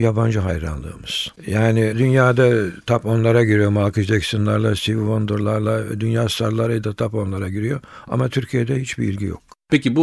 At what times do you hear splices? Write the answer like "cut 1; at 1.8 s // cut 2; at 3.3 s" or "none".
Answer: cut 1; at 1.4 s